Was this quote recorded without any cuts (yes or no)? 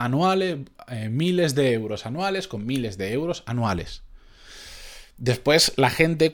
yes